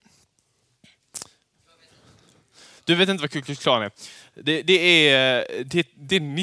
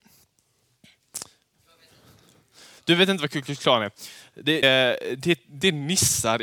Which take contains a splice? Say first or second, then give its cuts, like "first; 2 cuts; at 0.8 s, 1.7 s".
second; 1 cut; at 4.6 s